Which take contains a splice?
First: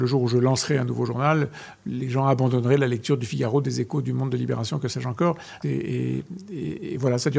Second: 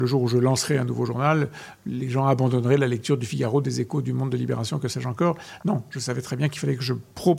first; 1 cut; at 5.6 s

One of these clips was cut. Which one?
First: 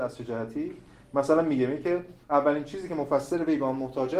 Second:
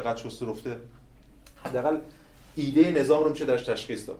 first; 1 cut; at 2.2 s

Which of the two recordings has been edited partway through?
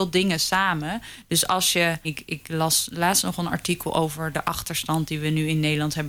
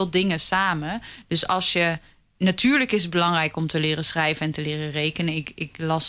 first; 1 cut; at 2.0 s

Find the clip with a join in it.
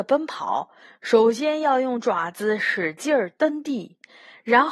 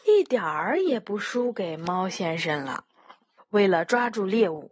second; 1 cut; at 3.4 s

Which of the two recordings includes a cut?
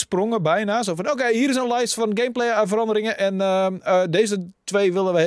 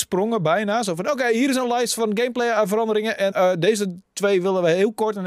second; 1 cut; at 3.3 s

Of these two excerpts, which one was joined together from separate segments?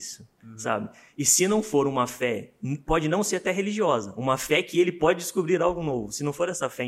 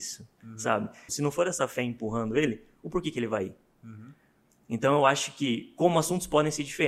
second; 1 cut; at 1.1 s

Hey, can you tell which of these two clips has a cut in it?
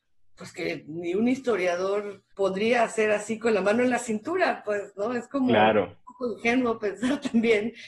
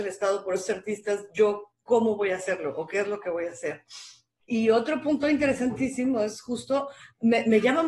first; 1 cut; at 2.3 s

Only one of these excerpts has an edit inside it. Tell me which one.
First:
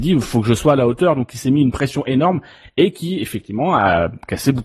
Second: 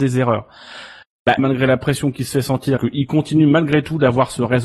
second; 2 cuts; at 1.4 s, 2.8 s

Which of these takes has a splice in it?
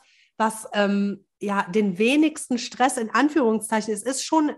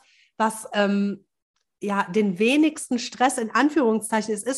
first; 1 cut; at 1.3 s

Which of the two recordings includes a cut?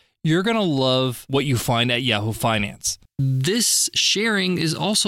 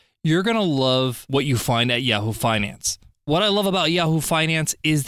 first; 1 cut; at 3.1 s

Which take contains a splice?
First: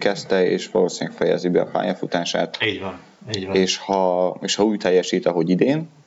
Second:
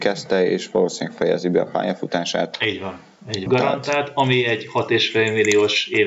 second; 1 cut; at 3.5 s

